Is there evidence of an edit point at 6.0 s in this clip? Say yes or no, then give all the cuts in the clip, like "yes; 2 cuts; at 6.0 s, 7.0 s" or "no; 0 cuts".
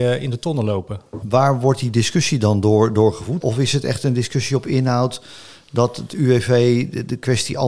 no; 2 cuts; at 1.2 s, 3.4 s